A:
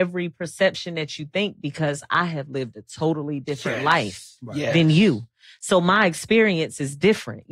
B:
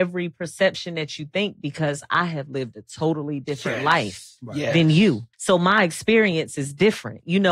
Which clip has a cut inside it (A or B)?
B